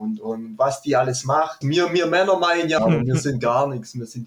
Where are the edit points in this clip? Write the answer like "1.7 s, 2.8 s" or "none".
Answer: 1.6 s, 2.8 s